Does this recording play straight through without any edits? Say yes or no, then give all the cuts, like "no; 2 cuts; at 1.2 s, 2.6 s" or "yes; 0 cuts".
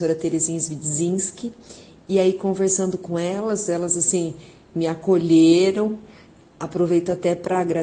yes; 0 cuts